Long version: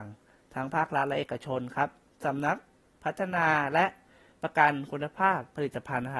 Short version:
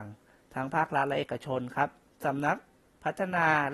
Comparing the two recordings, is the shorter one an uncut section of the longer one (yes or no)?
yes